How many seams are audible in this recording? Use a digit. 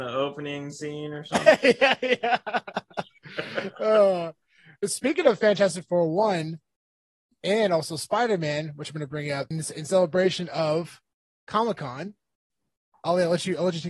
1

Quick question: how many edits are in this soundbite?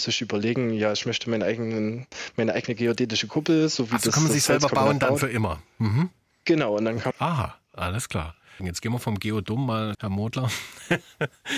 3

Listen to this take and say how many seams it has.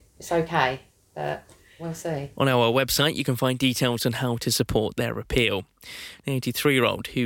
1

